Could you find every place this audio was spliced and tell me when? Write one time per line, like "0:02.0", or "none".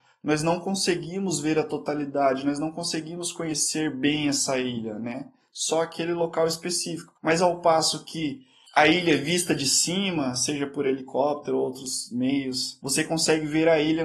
0:07.2